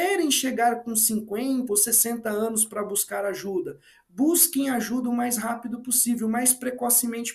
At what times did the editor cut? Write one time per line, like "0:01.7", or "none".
0:01.7